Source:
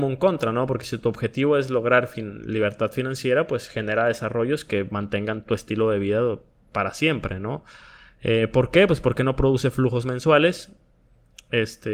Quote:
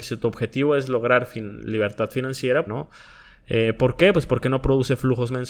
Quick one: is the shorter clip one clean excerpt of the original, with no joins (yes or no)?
no